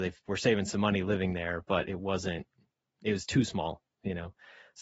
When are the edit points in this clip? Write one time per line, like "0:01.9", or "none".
none